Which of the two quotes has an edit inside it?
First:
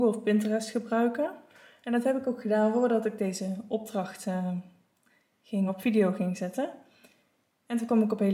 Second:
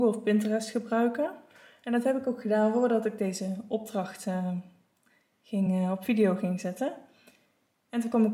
first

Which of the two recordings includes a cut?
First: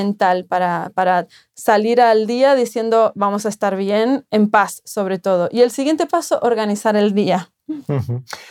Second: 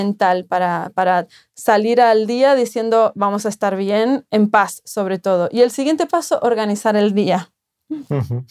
first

